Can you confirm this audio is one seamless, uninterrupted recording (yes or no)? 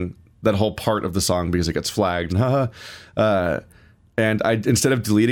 no